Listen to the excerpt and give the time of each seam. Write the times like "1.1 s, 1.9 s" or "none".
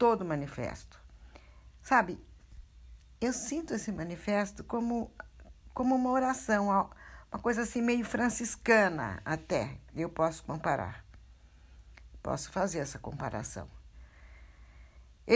none